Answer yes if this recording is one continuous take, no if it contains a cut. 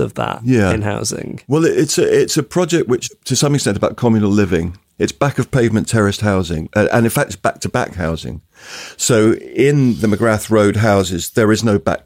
yes